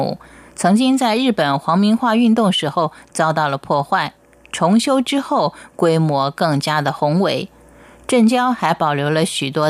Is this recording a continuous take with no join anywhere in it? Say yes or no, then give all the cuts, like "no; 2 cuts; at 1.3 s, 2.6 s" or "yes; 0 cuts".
yes; 0 cuts